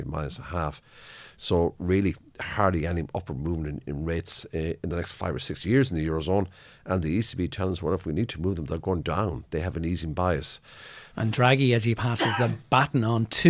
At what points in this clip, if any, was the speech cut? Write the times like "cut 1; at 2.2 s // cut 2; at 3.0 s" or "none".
cut 1; at 3.8 s // cut 2; at 11.1 s